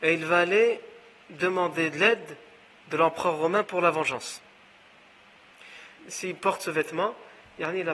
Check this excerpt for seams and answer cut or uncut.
cut